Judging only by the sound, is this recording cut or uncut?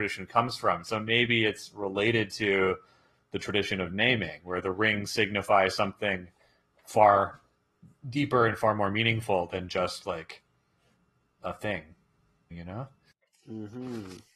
cut